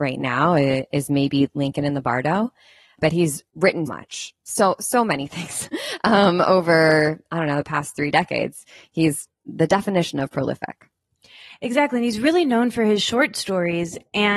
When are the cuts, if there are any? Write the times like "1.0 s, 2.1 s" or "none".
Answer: 3.9 s